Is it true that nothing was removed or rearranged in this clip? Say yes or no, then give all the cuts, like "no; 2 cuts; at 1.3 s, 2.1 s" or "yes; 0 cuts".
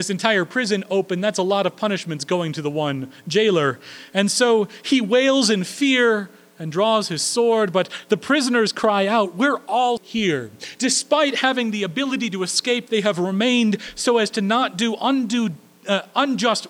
no; 1 cut; at 10.0 s